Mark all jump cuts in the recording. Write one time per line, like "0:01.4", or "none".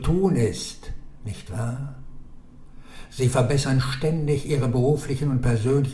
none